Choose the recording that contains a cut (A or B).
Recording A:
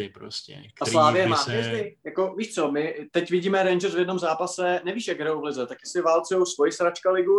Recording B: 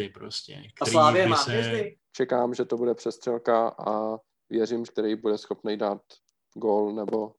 B